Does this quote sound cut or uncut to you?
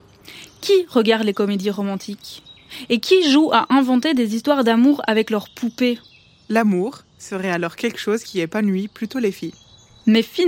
uncut